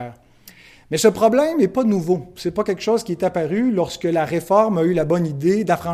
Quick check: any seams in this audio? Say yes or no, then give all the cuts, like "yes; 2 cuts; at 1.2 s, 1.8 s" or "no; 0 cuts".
no; 0 cuts